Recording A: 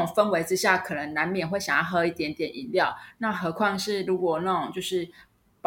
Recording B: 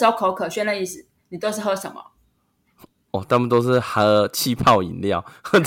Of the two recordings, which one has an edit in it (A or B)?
A